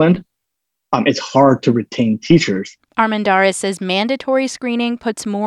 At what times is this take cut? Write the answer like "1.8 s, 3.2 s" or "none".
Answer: none

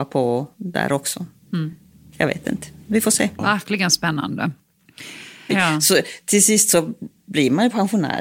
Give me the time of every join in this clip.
3.4 s, 5.5 s

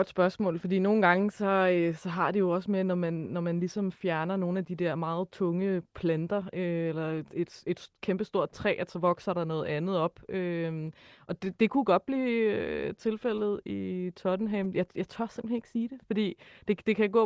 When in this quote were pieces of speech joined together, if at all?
none

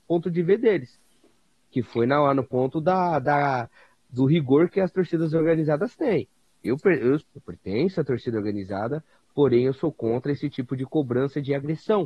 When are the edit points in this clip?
7.2 s

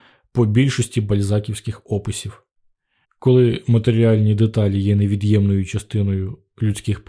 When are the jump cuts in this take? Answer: 3.0 s

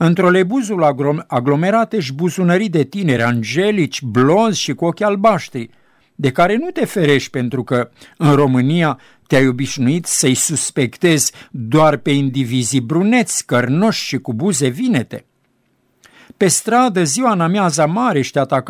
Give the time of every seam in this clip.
none

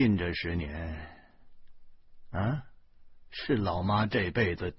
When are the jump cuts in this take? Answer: none

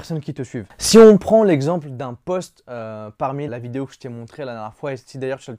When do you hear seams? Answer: 3.5 s

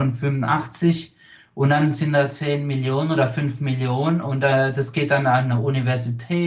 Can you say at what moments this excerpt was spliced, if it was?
none

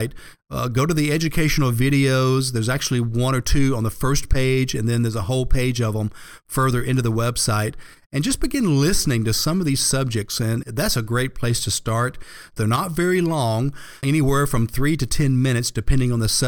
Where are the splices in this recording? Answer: 10.6 s, 12.6 s, 14.0 s

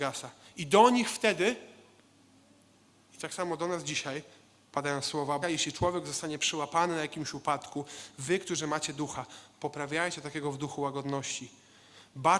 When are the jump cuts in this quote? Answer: 5.4 s

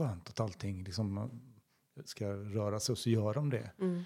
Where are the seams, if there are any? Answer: 2.1 s

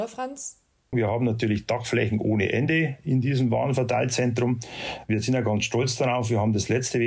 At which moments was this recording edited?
0.9 s

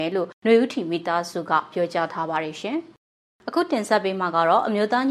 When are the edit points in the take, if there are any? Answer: none

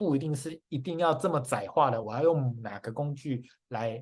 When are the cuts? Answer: none

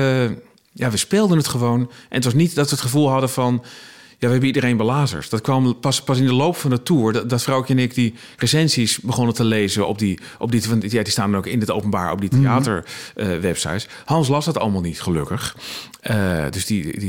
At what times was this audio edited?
none

